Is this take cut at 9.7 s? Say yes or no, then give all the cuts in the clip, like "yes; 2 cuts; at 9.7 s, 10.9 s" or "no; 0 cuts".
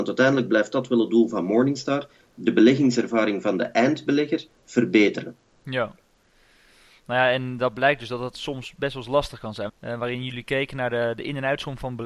yes; 1 cut; at 9.7 s